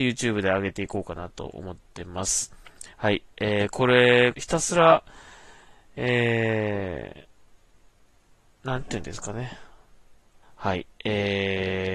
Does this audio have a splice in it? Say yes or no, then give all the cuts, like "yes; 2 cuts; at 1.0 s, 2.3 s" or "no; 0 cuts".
yes; 3 cuts; at 2.9 s, 4.3 s, 10.4 s